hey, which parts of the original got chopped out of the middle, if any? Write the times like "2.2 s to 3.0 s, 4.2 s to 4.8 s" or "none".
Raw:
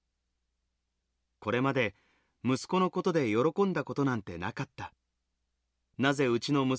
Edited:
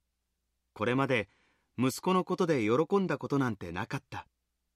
none